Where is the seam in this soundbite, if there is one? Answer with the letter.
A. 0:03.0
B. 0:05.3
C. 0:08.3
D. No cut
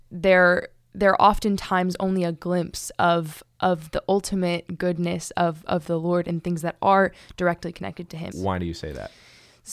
C